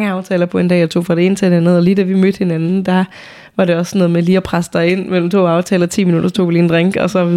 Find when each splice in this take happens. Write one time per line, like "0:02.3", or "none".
none